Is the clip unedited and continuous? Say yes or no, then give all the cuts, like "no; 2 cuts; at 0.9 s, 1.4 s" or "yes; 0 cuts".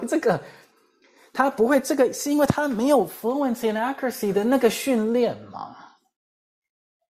yes; 0 cuts